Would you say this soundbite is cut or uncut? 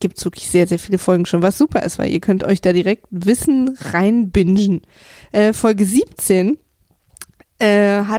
uncut